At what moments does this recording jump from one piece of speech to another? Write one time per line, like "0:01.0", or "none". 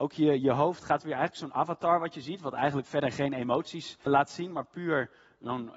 0:04.1